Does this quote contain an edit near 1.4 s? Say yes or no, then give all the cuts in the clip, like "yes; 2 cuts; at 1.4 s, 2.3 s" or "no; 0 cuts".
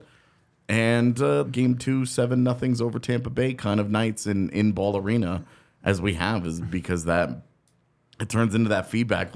yes; 1 cut; at 1.4 s